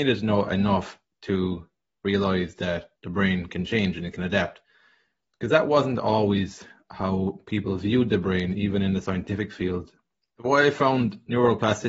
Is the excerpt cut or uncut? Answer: cut